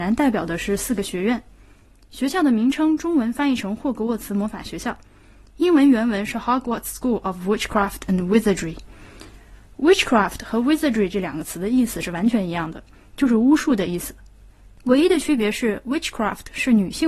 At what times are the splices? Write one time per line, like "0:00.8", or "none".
none